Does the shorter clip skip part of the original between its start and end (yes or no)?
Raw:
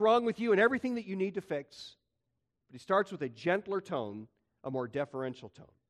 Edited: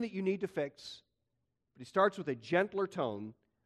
no